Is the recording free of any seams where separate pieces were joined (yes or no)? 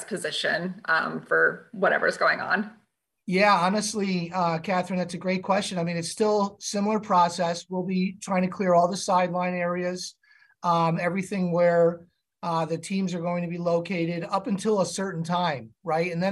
yes